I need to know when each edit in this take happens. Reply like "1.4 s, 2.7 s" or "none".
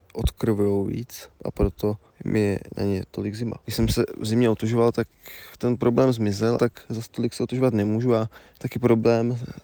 3.6 s, 6.6 s